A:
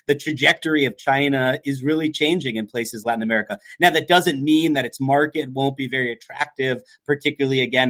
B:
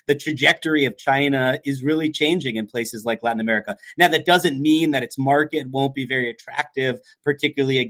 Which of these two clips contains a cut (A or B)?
A